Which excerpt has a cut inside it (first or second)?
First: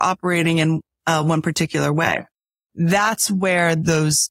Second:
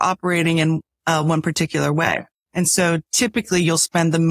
second